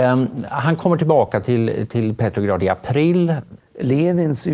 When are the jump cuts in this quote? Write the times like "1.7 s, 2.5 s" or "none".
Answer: 3.6 s